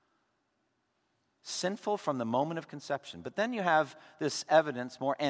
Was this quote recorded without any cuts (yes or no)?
yes